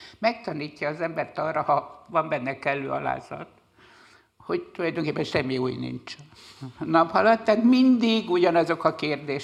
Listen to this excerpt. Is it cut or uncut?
uncut